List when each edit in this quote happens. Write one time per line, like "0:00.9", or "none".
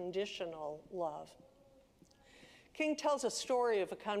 none